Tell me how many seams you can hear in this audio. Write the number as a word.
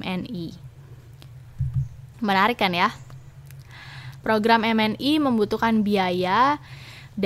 two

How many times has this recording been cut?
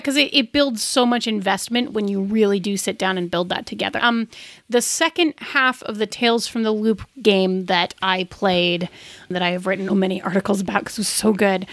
two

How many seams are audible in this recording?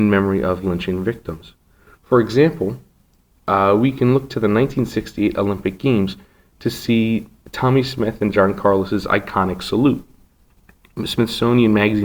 one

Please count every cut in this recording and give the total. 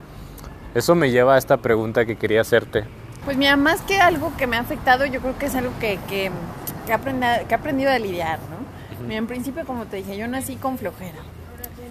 one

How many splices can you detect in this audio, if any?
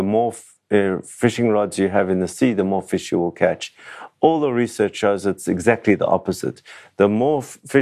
zero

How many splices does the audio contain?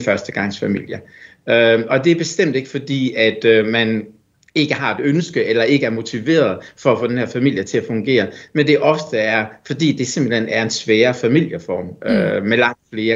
zero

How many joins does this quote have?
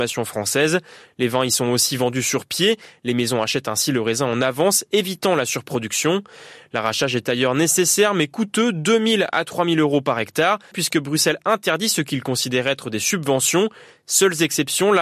one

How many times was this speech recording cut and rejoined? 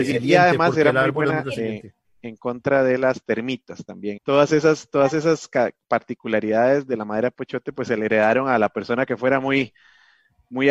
one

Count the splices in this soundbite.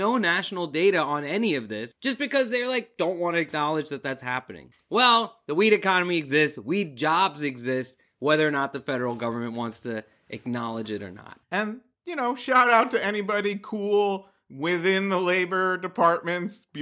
zero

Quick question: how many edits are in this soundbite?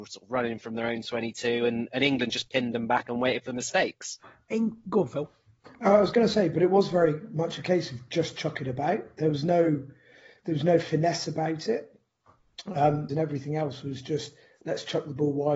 one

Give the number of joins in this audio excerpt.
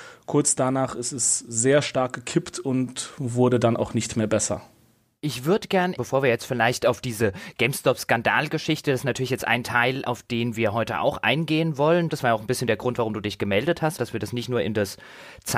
three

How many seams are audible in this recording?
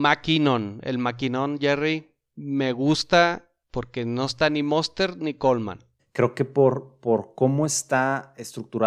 one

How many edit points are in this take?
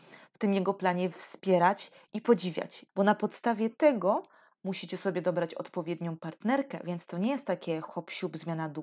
one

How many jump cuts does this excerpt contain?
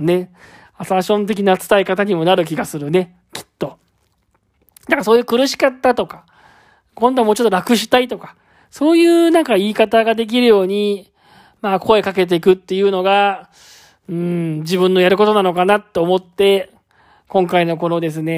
zero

